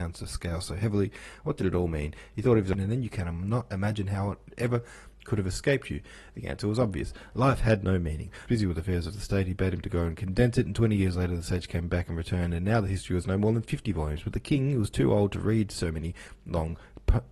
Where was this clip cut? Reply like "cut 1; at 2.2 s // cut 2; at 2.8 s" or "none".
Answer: cut 1; at 8.5 s